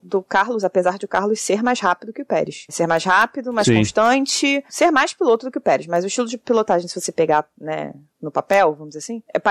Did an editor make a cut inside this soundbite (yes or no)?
no